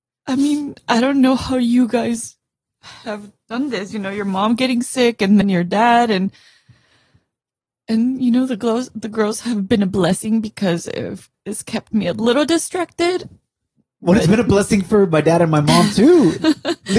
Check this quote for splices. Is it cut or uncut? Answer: cut